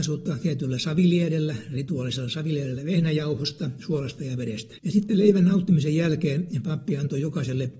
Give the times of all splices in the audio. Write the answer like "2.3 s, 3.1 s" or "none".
4.8 s